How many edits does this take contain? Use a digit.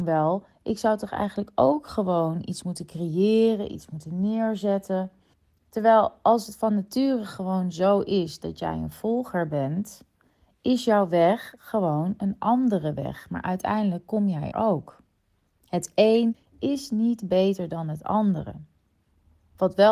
1